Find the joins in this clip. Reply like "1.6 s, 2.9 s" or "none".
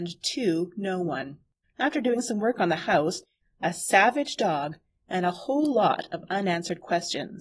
1.6 s, 3.4 s